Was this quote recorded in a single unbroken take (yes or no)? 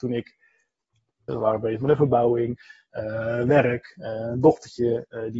no